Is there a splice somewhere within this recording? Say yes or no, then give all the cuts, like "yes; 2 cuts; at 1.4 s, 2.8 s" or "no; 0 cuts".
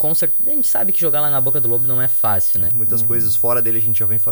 yes; 1 cut; at 2.7 s